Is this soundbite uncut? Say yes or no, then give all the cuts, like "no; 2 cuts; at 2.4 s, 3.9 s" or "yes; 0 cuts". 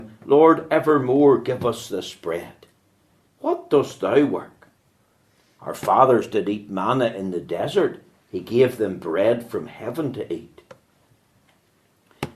no; 2 cuts; at 3.3 s, 8.2 s